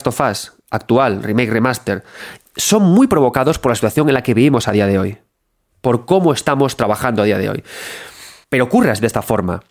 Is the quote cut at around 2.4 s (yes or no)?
yes